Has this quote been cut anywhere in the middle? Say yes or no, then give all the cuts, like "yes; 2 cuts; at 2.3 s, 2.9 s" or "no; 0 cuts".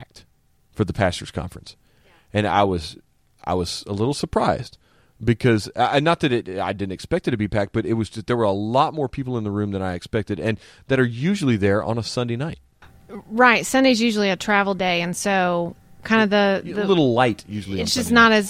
no; 0 cuts